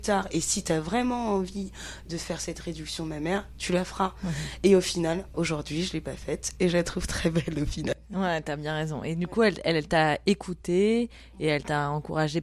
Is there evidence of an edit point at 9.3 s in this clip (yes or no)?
no